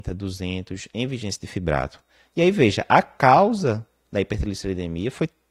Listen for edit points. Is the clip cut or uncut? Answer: uncut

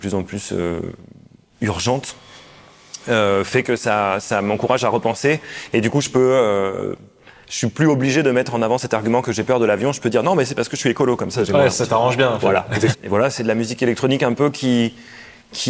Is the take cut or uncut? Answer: cut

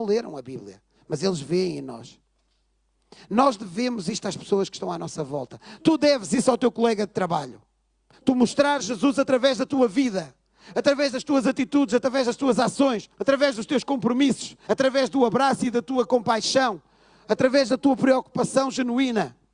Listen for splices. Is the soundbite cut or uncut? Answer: cut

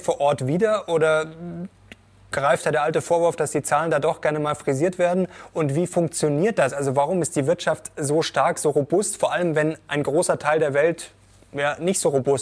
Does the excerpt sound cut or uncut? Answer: uncut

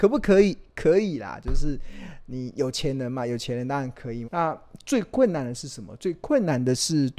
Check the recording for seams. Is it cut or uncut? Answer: cut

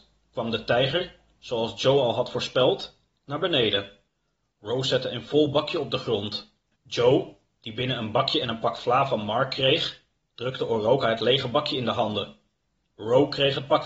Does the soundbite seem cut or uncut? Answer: cut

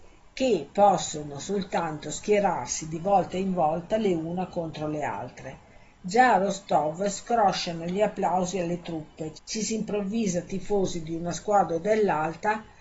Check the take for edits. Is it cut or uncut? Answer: cut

